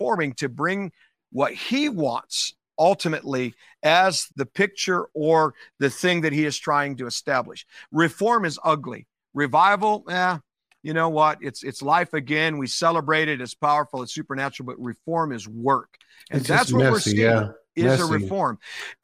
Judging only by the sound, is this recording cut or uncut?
cut